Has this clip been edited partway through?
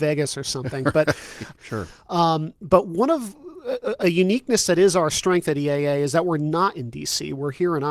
yes; 1 cut; at 1.6 s

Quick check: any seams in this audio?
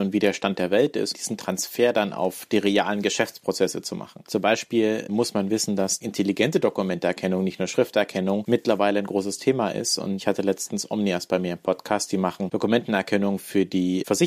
yes; 1 cut; at 1.1 s

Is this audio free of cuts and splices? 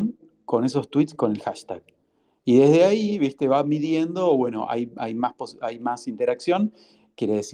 yes; 0 cuts

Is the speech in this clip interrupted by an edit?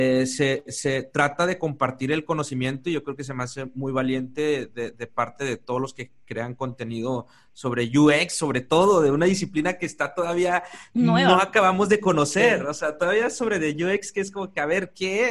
no; 0 cuts

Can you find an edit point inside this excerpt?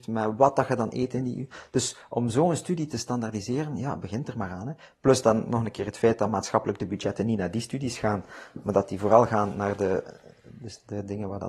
no; 0 cuts

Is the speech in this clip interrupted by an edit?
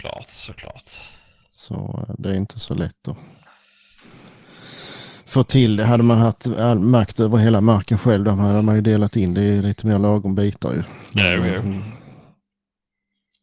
no; 0 cuts

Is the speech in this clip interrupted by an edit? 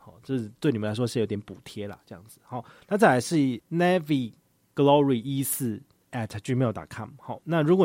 no; 0 cuts

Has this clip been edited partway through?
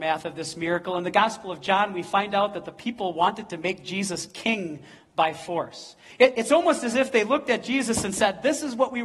no; 0 cuts

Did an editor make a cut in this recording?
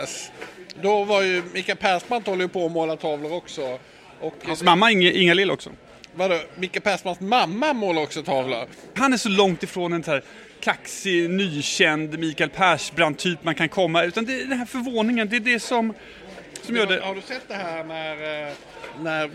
yes; 1 cut; at 9.0 s

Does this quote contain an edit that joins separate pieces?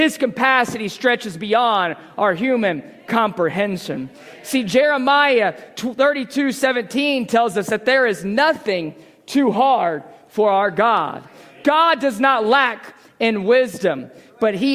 no; 0 cuts

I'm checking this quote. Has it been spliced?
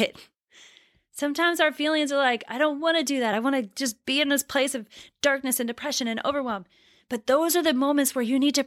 no; 0 cuts

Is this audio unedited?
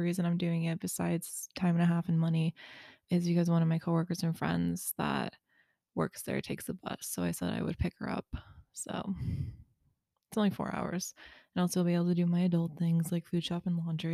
yes; 0 cuts

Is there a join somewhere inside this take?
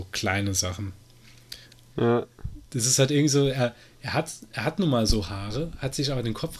yes; 1 cut; at 1.9 s

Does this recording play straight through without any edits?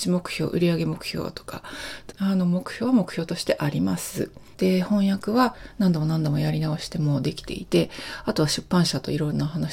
no; 2 cuts; at 2.1 s, 4.5 s

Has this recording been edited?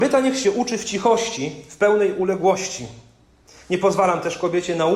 no; 0 cuts

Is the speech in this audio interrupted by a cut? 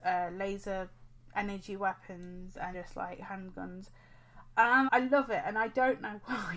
yes; 2 cuts; at 2.7 s, 4.9 s

